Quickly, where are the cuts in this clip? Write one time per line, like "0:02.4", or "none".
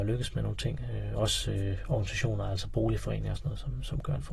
none